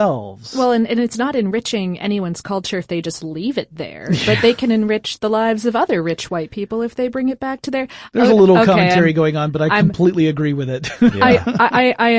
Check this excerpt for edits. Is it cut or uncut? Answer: uncut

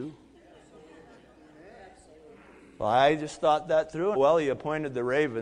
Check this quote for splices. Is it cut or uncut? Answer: cut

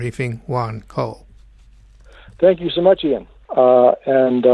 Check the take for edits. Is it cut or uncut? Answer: cut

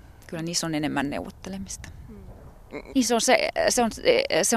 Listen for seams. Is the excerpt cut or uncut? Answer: cut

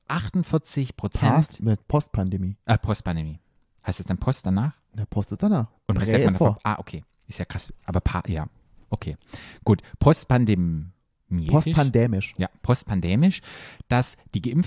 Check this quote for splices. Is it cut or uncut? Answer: cut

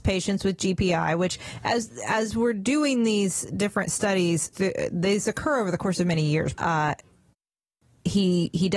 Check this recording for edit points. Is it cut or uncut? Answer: cut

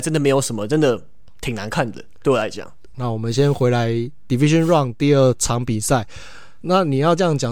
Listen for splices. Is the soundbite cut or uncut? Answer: cut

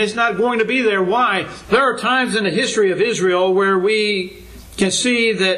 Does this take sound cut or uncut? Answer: cut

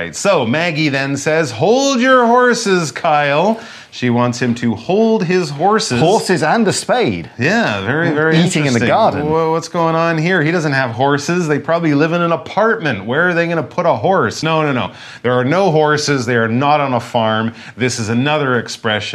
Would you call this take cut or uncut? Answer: uncut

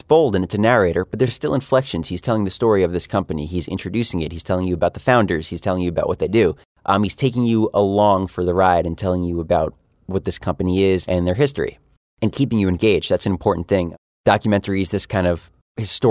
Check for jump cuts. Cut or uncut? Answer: uncut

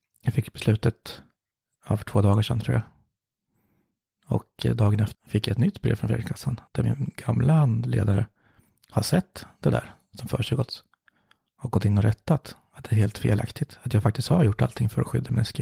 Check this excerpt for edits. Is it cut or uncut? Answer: cut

